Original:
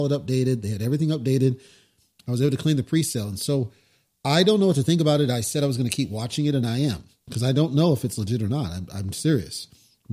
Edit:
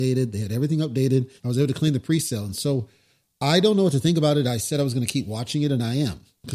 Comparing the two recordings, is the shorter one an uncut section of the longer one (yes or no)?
no